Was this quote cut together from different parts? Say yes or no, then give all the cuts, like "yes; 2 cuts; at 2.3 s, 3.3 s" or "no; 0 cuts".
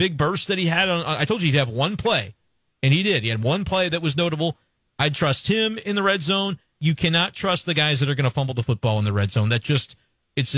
no; 0 cuts